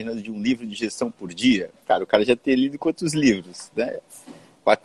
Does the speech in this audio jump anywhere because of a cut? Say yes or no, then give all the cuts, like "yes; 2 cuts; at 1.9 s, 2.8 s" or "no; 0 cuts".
yes; 1 cut; at 1.8 s